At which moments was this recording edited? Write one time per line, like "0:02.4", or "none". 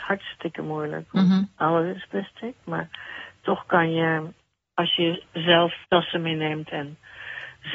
0:05.8